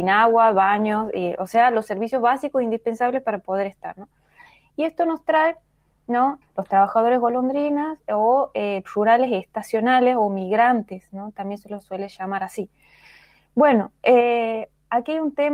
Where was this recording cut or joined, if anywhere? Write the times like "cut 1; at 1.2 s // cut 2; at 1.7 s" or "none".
cut 1; at 6.4 s // cut 2; at 8.8 s